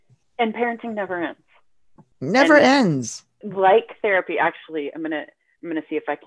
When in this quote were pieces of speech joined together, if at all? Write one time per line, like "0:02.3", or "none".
0:03.4